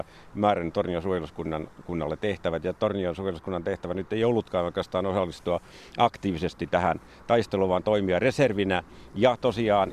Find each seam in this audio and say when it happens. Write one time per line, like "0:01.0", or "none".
none